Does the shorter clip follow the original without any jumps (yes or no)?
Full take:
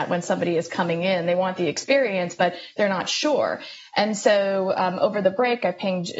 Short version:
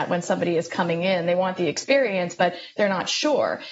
yes